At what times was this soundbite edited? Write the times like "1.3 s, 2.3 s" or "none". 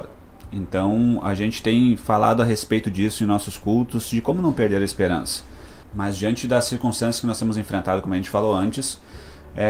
5.8 s